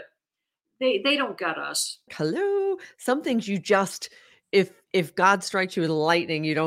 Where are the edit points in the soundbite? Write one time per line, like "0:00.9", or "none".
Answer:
0:02.1

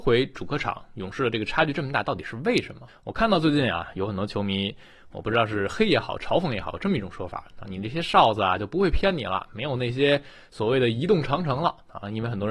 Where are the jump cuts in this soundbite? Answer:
0:02.9
0:07.6

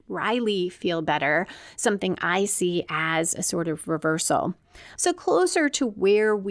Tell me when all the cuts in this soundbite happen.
0:05.0

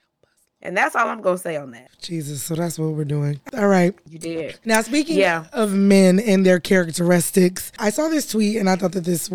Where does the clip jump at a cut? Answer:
0:03.5

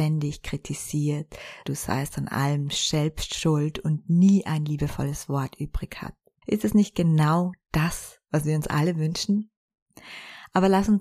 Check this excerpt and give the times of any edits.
0:01.6
0:06.4

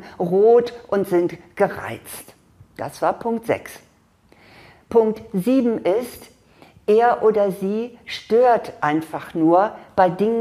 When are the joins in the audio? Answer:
none

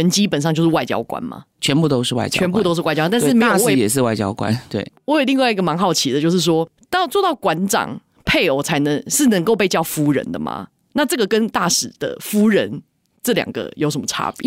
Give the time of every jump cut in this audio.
none

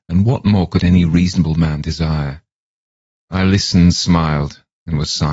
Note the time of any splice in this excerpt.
none

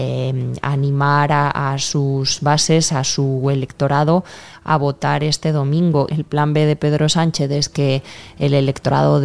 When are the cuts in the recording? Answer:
0:06.1

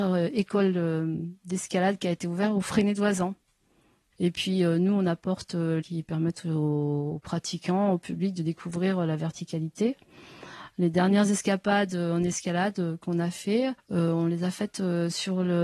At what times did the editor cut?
0:04.1
0:05.8

